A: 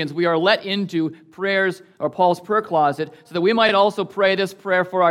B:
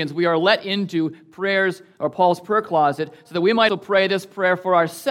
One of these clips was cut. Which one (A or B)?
B